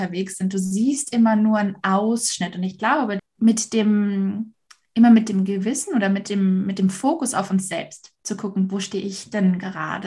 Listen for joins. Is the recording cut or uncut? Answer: cut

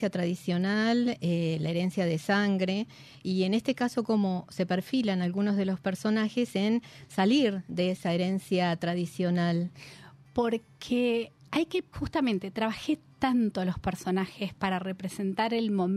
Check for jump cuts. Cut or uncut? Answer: cut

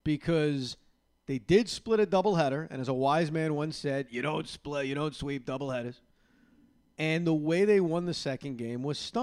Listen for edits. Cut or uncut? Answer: uncut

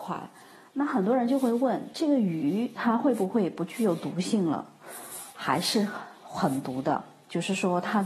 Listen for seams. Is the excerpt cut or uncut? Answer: cut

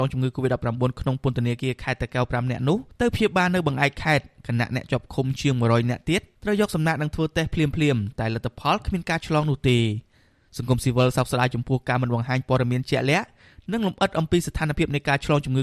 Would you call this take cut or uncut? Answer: uncut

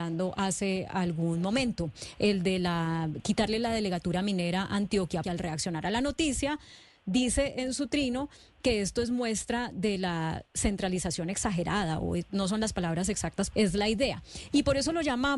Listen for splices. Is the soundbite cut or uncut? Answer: cut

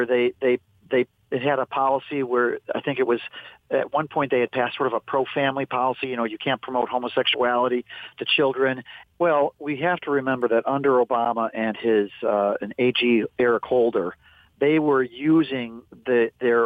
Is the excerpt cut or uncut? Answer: cut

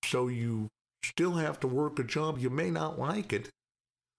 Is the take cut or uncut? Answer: uncut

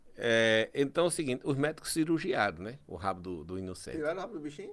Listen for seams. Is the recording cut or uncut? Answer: uncut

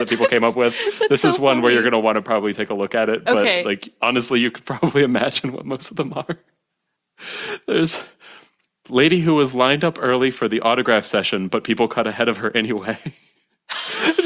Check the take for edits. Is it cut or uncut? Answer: uncut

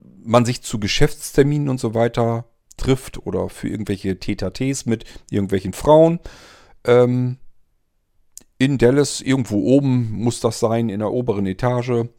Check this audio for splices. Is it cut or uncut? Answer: uncut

